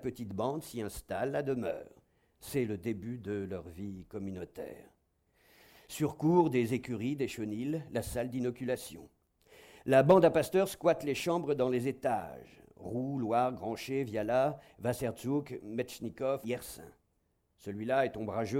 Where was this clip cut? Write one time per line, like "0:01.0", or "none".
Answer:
0:16.4